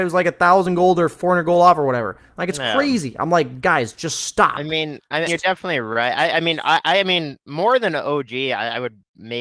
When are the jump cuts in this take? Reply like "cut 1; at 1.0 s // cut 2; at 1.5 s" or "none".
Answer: cut 1; at 5.3 s